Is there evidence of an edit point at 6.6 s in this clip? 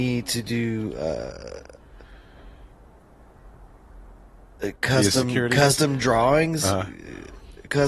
no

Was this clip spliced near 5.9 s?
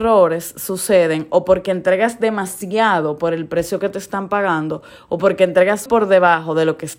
yes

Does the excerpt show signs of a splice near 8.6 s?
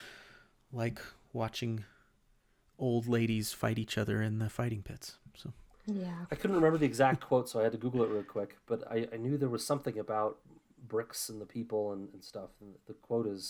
no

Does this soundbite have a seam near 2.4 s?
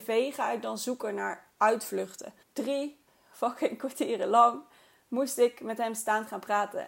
yes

